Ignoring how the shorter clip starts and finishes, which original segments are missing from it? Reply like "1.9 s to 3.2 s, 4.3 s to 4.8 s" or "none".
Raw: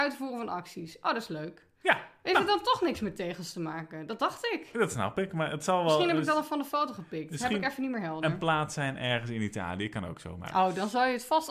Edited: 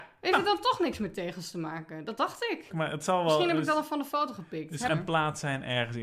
4.7 s to 5.3 s, 7.5 s to 8.2 s